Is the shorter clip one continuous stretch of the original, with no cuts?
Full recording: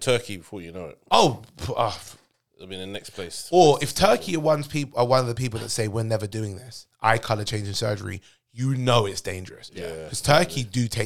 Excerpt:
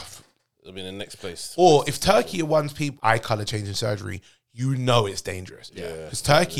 no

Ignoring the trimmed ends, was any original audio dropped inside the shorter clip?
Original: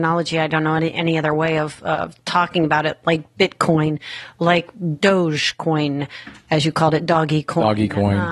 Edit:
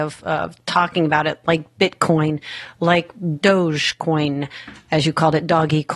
no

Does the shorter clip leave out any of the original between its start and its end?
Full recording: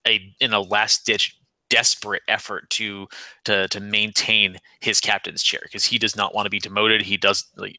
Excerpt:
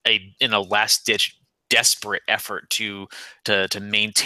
no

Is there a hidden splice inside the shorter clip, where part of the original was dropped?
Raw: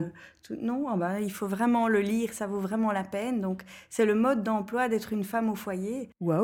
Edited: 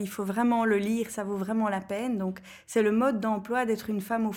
no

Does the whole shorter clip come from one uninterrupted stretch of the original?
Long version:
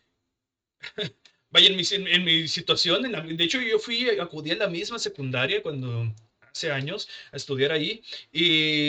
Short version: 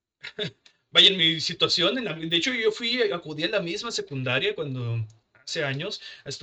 no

